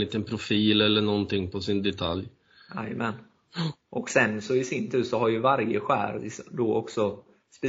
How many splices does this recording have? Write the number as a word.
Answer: zero